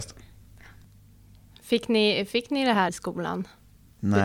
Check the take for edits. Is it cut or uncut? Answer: cut